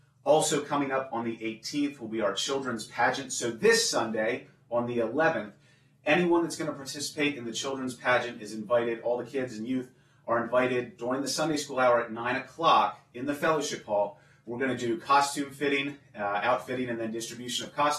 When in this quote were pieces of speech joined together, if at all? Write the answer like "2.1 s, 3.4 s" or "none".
none